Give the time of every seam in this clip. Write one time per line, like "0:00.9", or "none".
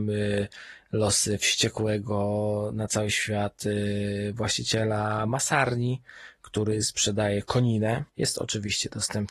0:08.1